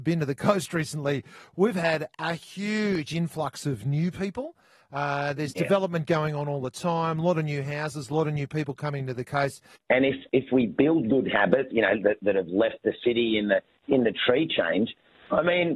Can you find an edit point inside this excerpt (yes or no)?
yes